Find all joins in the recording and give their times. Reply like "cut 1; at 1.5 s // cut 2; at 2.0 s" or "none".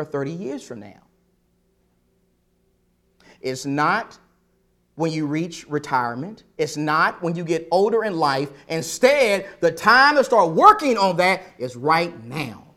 none